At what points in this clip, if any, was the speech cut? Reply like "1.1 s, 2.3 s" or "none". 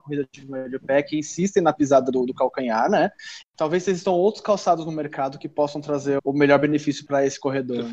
3.4 s, 6.2 s